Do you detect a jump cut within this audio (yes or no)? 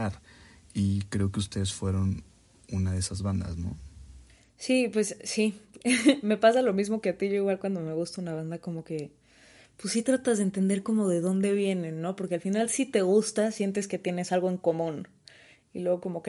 no